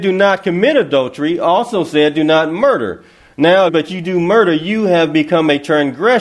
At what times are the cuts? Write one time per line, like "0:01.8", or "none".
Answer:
0:03.7

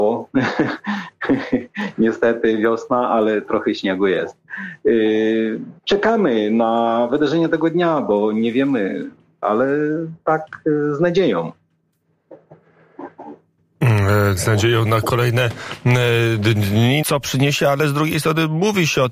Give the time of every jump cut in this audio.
0:05.8
0:09.4
0:17.0

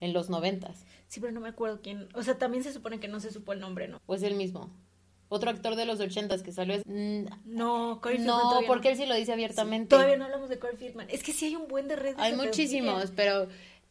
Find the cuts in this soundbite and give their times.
0:04.0
0:06.8

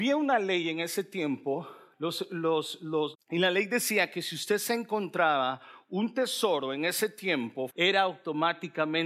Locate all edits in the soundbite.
0:03.1
0:07.7

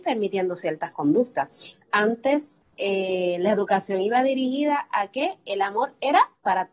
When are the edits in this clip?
0:01.7

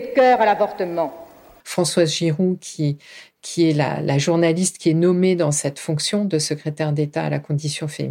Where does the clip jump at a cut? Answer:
0:01.6

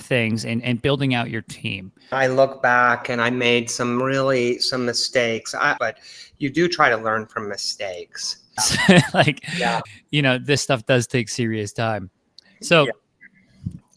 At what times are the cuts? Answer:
0:02.1
0:05.8
0:08.6

